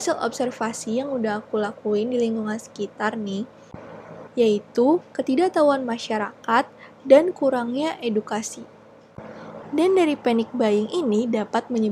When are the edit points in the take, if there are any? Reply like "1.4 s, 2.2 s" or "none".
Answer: 4.3 s, 9.6 s